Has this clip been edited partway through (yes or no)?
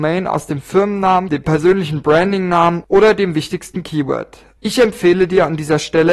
yes